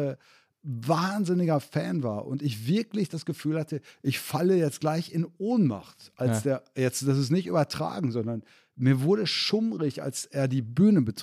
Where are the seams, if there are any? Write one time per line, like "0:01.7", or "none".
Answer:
none